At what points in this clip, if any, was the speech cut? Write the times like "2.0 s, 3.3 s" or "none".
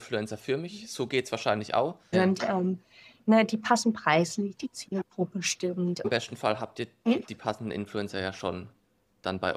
2.1 s, 6.0 s